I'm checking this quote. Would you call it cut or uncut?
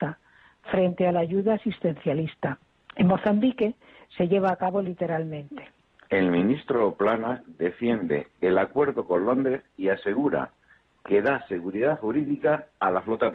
cut